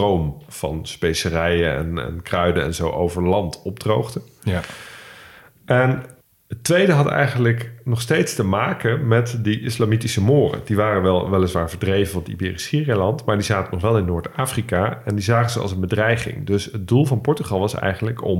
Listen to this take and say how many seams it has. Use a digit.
0